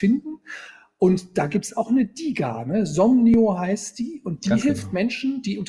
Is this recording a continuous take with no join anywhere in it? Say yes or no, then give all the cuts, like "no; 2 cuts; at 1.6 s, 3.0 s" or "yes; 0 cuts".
yes; 0 cuts